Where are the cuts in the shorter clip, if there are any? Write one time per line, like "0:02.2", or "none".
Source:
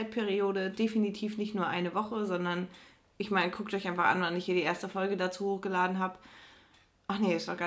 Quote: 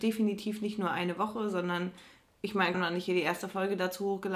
0:02.7